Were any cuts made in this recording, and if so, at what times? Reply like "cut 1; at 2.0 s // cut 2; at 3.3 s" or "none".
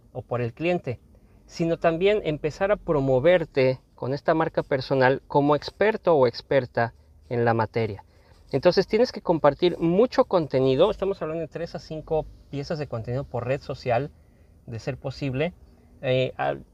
none